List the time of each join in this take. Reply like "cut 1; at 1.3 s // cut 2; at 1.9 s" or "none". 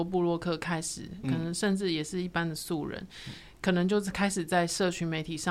cut 1; at 1.2 s